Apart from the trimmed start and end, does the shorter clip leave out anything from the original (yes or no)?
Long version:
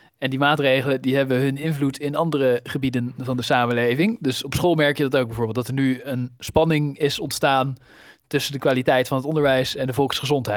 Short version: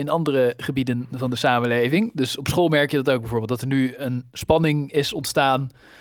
no